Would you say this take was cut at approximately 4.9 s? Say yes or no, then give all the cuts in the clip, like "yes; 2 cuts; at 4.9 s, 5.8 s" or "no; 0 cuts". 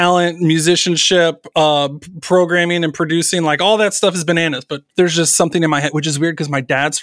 yes; 1 cut; at 4.9 s